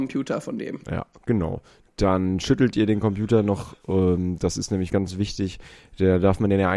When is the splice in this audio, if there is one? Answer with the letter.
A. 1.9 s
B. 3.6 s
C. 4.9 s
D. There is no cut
C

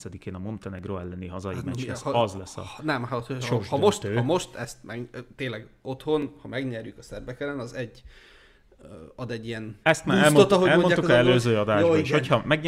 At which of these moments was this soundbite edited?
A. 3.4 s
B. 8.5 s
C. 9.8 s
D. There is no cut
C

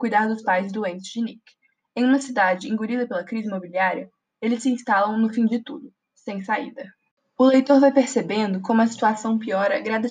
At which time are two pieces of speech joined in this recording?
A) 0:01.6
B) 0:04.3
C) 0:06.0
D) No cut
C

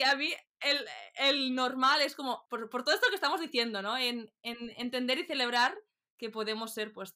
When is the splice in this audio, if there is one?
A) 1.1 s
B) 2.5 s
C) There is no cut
B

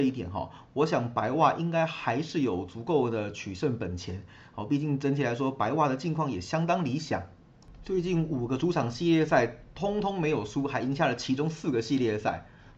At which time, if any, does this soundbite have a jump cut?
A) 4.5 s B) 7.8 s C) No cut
C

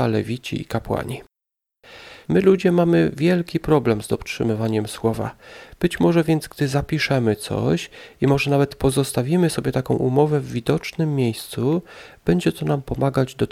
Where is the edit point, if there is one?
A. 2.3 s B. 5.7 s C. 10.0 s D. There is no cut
A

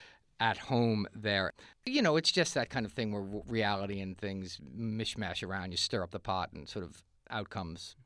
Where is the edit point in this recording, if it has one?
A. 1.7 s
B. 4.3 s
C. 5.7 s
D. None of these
A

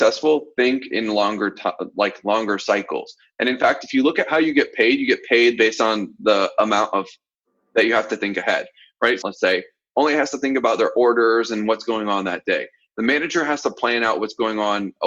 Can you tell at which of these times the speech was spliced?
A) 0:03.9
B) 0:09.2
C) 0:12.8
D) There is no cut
B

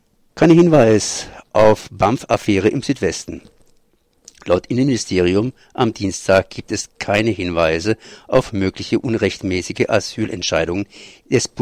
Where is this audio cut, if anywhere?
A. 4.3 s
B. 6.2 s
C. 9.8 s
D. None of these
D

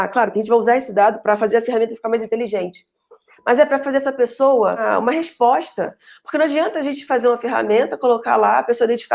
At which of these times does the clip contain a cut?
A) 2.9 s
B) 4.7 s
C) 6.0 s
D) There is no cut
D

